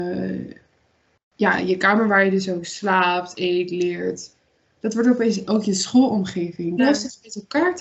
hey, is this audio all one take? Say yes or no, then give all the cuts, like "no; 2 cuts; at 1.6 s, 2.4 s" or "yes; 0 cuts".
no; 1 cut; at 6.8 s